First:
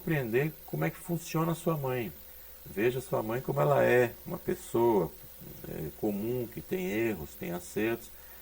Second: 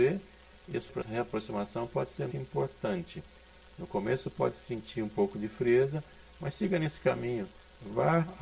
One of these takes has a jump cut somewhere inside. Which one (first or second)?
second